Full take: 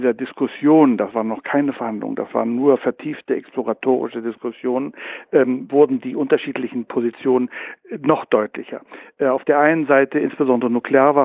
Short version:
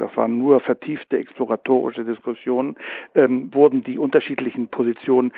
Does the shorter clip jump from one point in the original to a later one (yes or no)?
no